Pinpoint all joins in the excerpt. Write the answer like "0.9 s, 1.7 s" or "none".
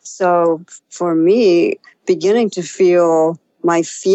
none